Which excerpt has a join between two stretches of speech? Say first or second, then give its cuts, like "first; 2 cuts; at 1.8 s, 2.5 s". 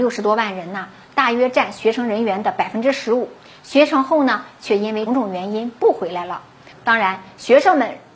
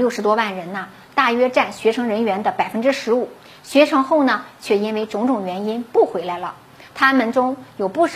first; 2 cuts; at 5.1 s, 6.7 s